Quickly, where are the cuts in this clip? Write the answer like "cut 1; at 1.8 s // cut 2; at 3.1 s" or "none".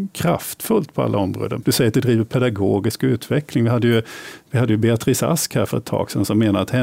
cut 1; at 1.6 s